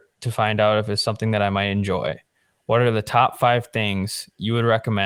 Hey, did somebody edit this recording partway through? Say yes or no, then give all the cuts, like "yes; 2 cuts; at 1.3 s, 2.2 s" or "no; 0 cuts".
no; 0 cuts